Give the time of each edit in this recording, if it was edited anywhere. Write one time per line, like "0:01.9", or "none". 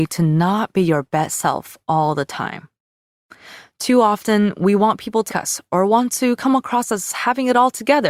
0:05.3